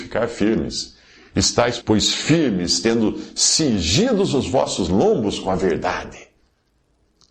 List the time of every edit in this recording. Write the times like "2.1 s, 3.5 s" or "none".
1.8 s